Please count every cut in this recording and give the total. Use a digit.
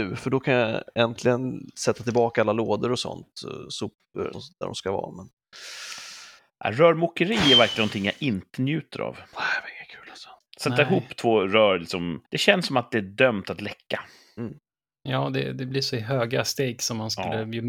2